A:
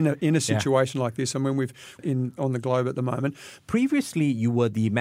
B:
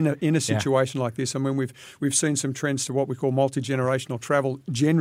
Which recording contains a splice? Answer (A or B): A